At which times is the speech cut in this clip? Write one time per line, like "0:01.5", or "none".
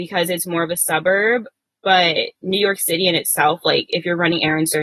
none